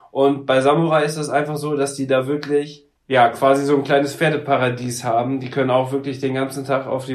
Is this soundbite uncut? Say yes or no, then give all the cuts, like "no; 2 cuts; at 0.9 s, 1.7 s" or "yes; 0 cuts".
no; 1 cut; at 3.0 s